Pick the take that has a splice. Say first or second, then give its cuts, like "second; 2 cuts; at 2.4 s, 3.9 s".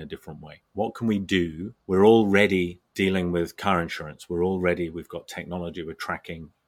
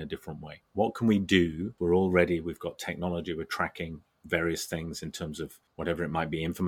second; 1 cut; at 1.8 s